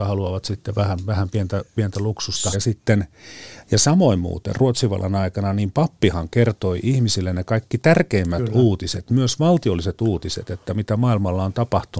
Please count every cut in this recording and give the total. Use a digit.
1